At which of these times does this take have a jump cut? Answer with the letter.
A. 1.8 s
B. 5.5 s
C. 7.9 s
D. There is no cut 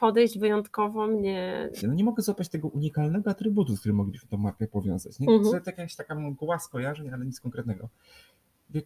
A